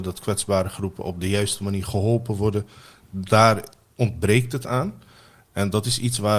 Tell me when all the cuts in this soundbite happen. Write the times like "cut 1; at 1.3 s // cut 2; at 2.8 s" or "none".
none